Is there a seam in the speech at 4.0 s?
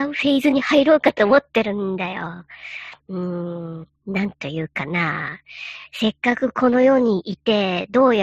yes; 1 cut; at 4.0 s

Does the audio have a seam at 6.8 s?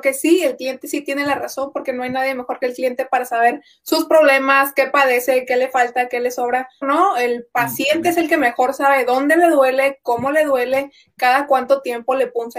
yes; 1 cut; at 6.8 s

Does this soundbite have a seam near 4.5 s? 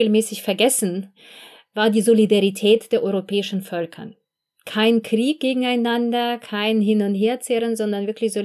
no; 0 cuts

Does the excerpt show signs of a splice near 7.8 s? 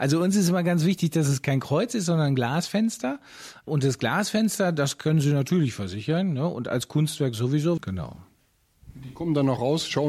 yes; 1 cut; at 7.8 s

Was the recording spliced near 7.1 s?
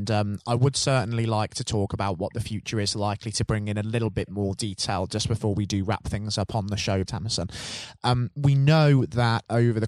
yes; 1 cut; at 7.1 s

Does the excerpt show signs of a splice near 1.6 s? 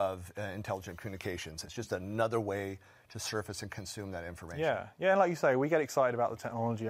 yes; 1 cut; at 1.6 s

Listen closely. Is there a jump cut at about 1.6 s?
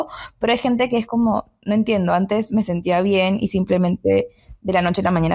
no; 0 cuts

